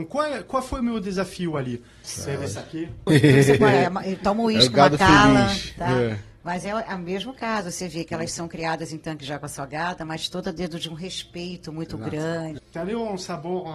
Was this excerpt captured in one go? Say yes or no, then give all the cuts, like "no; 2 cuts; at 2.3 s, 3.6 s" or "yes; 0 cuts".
no; 3 cuts; at 2.0 s, 3.1 s, 12.6 s